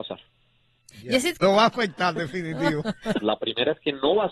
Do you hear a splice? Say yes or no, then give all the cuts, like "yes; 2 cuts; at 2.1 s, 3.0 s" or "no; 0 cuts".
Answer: yes; 2 cuts; at 1.4 s, 3.2 s